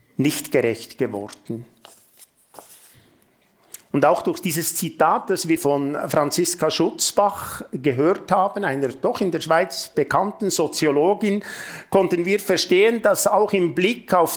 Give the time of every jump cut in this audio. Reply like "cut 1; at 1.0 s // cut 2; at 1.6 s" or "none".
cut 1; at 5.6 s